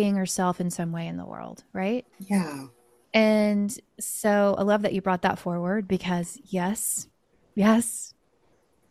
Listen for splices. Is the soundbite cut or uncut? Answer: cut